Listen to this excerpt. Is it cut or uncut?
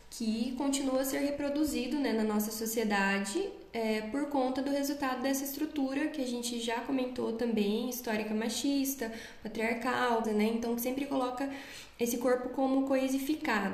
cut